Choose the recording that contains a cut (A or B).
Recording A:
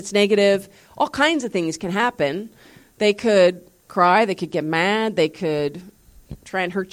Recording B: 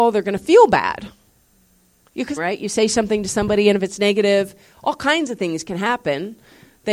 B